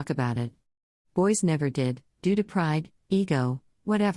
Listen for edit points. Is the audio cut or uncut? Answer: uncut